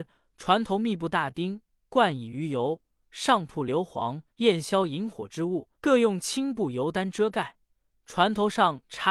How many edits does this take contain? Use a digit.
3